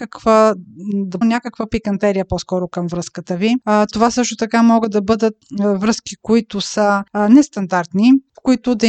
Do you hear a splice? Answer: yes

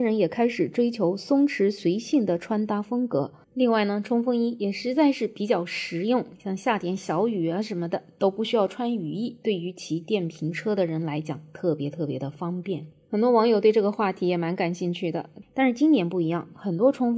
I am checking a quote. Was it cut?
yes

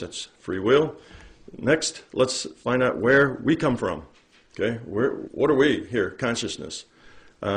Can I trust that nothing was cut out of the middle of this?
no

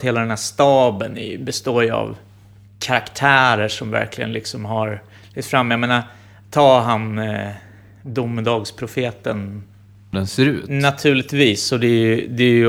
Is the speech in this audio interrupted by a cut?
yes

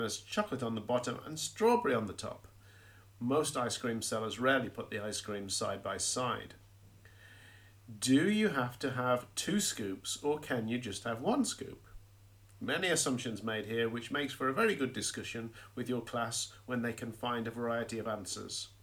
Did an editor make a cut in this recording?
no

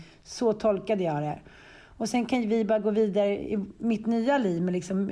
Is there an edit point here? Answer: no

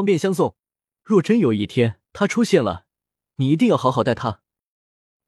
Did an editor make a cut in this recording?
yes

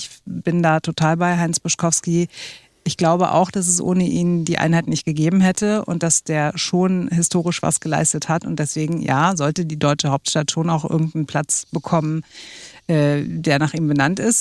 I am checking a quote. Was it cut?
no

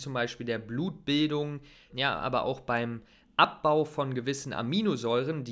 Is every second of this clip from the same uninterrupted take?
no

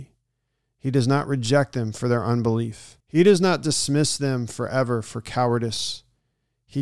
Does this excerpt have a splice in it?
yes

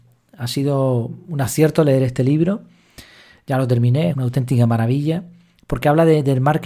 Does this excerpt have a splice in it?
yes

